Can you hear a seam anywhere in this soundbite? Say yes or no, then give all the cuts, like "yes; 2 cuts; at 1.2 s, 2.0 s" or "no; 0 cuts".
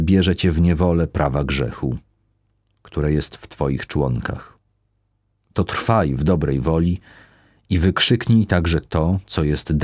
no; 0 cuts